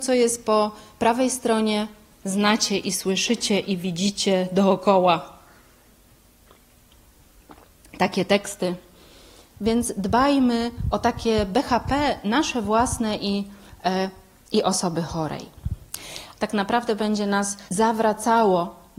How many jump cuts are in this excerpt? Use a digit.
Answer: 3